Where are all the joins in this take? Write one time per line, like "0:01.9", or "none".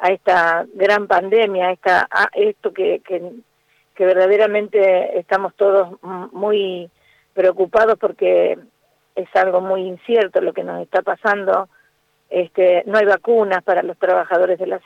none